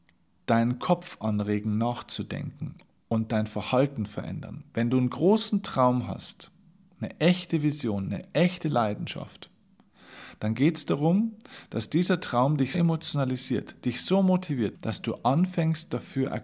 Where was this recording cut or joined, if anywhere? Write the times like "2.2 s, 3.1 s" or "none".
12.7 s, 14.7 s